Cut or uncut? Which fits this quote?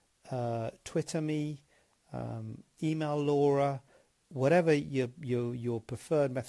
uncut